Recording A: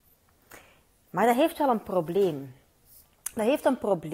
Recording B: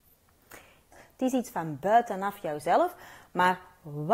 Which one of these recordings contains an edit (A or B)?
B